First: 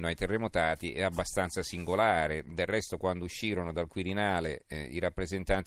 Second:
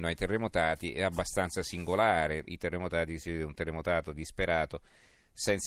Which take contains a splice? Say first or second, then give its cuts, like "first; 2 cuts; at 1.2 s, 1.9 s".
second; 1 cut; at 2.4 s